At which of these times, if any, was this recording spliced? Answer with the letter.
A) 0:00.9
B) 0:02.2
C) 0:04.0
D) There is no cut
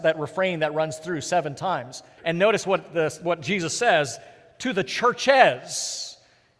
B